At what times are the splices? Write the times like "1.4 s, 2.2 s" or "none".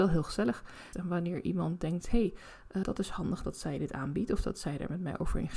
0.9 s, 2.8 s